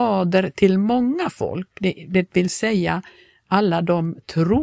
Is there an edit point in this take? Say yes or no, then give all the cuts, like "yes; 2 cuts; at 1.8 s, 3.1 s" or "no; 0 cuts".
no; 0 cuts